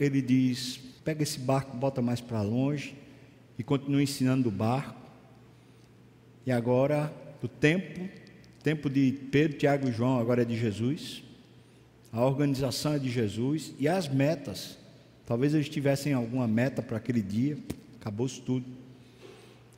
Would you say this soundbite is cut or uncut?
cut